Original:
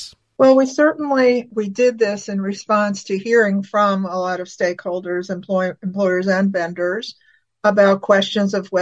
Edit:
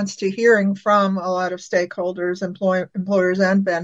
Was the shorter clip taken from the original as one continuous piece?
yes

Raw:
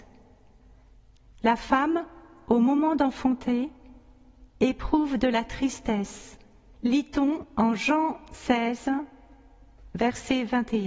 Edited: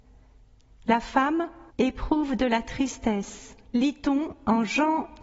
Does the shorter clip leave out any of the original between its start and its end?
yes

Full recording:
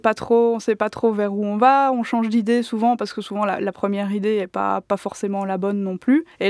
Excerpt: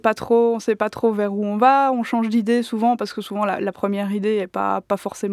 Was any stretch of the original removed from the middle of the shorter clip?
no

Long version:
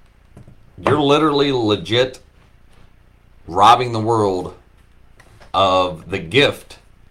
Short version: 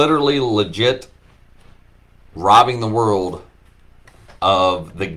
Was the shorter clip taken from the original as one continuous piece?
yes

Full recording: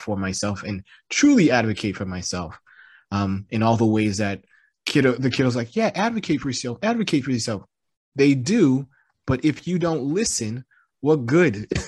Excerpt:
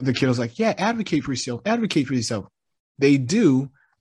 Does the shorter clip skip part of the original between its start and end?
no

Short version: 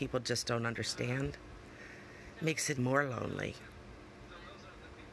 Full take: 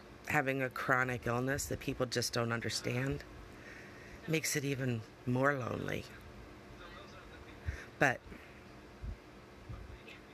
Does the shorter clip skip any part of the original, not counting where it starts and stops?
yes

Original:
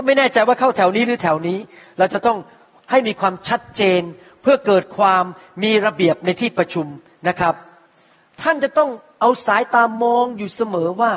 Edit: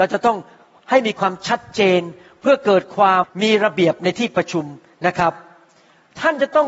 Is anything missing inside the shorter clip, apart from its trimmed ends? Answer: yes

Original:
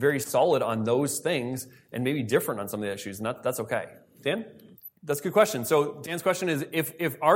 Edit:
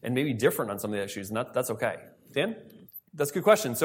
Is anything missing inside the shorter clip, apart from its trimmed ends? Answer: no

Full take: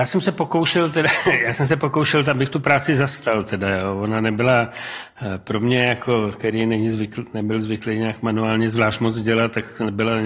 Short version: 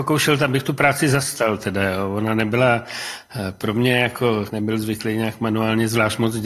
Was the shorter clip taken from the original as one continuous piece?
no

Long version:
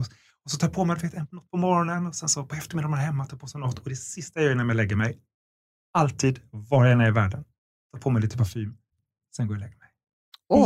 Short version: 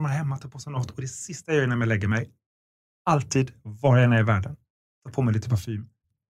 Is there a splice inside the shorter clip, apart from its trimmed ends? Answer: no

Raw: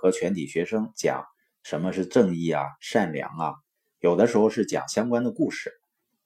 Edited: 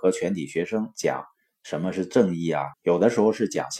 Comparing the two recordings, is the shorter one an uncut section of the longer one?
no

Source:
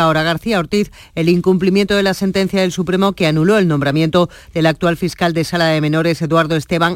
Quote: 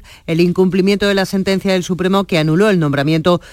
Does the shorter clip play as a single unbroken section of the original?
yes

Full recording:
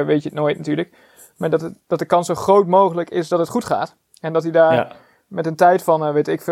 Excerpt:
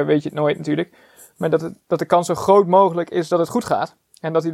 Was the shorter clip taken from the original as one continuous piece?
yes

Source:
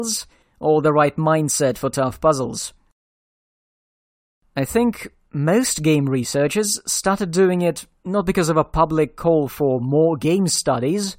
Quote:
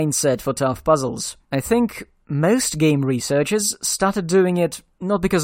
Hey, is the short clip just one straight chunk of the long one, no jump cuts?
no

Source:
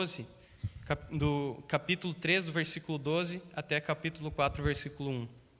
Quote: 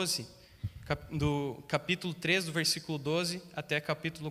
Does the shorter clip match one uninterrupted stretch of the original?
yes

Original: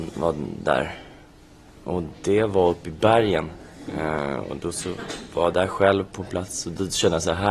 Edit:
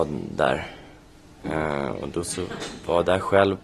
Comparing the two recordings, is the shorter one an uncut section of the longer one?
no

